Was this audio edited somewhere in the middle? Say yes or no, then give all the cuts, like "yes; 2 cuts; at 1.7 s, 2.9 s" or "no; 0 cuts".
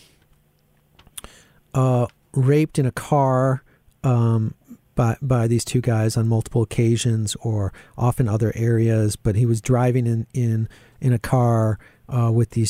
no; 0 cuts